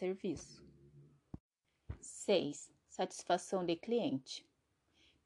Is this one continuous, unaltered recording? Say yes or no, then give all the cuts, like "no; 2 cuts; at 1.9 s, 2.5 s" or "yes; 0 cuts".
yes; 0 cuts